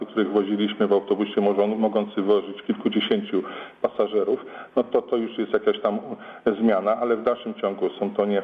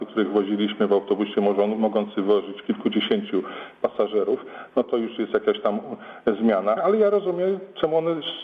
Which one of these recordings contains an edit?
second; 2 cuts; at 4.8 s, 6.8 s

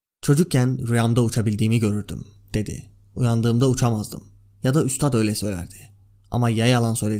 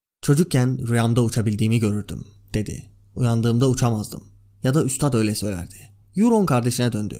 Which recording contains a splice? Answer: second; 1 cut; at 6.0 s

